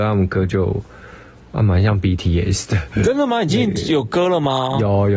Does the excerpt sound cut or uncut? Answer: uncut